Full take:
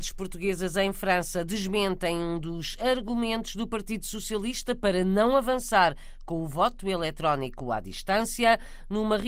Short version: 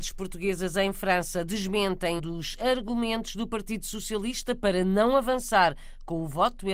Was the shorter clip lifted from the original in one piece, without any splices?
no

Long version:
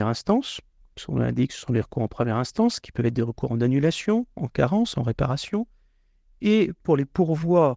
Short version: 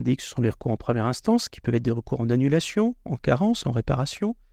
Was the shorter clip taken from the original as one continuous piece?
yes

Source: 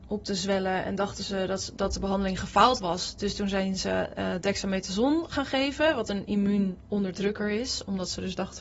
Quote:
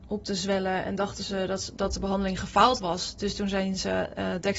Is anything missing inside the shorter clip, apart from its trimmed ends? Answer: no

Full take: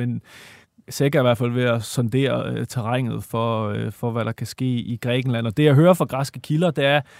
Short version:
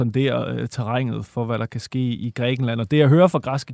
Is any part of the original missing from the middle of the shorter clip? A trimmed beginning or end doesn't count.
yes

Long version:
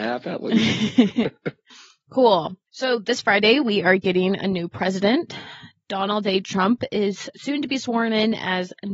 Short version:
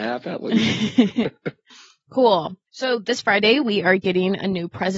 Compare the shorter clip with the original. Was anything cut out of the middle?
no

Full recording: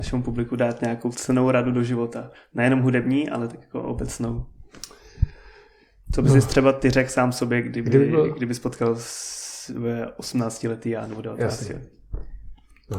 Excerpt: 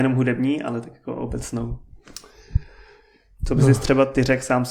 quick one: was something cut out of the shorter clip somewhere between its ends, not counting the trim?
no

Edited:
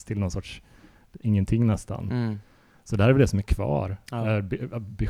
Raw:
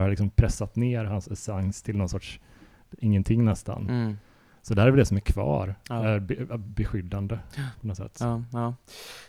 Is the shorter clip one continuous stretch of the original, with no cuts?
yes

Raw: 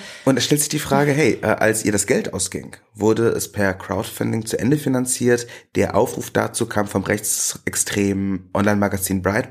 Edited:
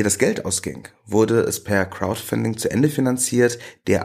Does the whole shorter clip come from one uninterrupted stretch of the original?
yes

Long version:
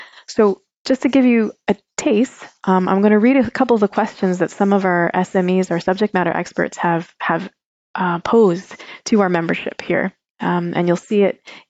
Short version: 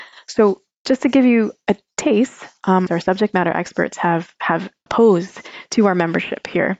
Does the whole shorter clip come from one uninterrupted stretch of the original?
no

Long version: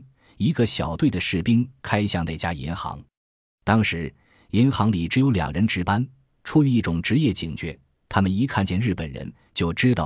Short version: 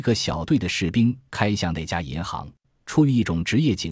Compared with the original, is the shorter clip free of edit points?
no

